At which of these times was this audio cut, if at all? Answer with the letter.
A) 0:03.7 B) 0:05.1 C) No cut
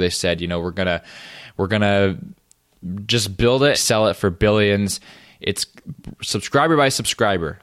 A